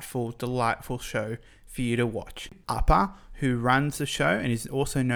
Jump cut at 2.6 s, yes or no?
yes